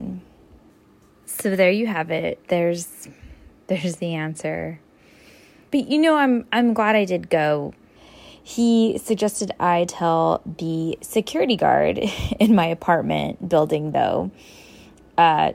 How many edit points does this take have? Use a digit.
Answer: 2